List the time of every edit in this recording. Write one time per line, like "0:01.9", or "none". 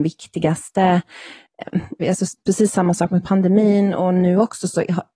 0:02.0